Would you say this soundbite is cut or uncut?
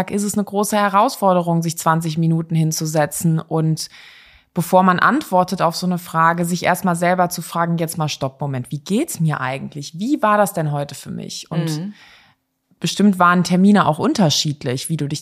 cut